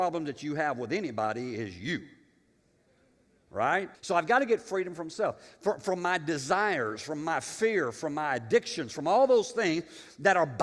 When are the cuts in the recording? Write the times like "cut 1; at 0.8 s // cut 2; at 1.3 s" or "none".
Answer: cut 1; at 3.9 s